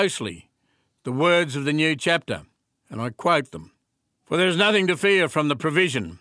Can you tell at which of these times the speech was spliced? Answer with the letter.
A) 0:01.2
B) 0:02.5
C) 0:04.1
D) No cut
C